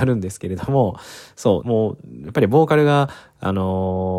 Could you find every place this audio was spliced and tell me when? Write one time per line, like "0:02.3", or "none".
0:01.6